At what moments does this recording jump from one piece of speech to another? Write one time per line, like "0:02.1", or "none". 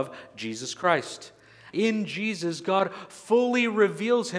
0:01.7